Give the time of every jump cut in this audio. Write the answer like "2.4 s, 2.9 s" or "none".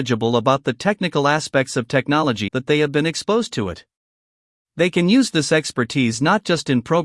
2.5 s, 4.6 s